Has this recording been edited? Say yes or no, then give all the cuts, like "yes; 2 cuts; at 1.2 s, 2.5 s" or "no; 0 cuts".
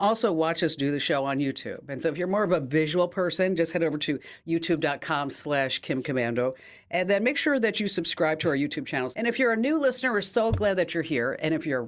yes; 1 cut; at 9.1 s